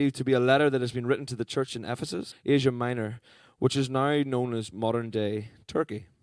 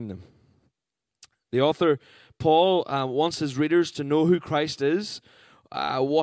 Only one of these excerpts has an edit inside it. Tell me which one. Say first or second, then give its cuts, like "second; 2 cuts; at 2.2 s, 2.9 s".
first; 1 cut; at 2.3 s